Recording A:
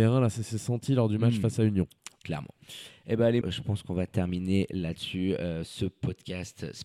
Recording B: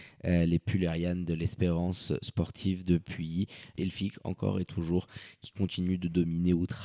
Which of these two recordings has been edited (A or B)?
A